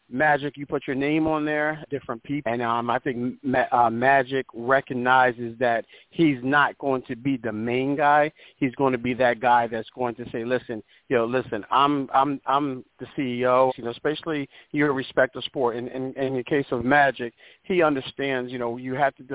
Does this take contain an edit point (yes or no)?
yes